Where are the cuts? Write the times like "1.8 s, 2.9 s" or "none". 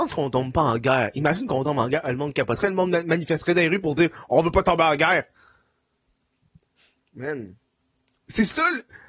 8.2 s